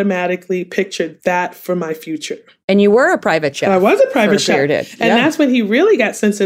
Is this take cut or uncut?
uncut